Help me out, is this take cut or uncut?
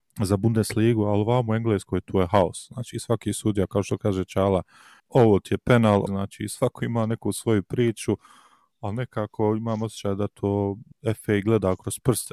cut